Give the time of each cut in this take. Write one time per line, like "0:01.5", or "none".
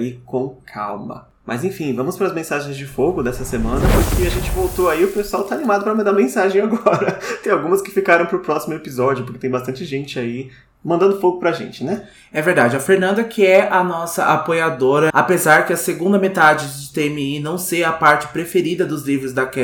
0:15.1

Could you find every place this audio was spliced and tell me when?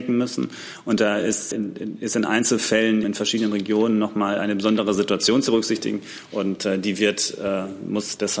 0:01.5
0:03.0

